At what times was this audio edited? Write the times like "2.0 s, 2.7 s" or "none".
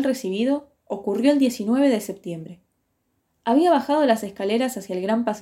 none